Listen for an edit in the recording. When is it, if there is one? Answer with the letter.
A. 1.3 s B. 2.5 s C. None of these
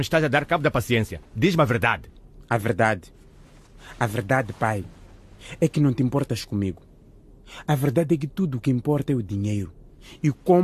C